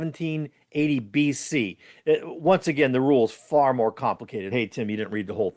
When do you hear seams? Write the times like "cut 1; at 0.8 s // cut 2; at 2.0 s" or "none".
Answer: cut 1; at 4.5 s